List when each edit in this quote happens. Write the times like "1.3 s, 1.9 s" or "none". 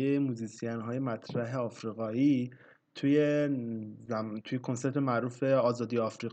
none